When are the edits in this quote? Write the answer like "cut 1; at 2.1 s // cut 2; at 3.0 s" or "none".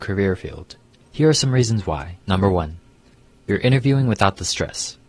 cut 1; at 1.1 s // cut 2; at 2.2 s